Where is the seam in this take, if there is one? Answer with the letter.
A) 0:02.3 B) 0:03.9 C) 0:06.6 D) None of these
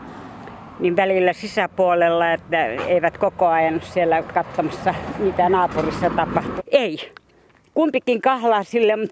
C